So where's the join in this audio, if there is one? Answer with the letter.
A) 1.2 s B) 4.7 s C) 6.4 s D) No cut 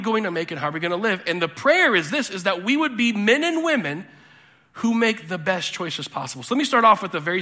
D